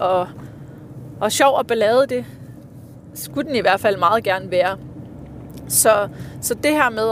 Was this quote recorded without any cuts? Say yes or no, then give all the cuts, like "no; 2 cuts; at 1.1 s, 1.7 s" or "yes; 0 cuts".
yes; 0 cuts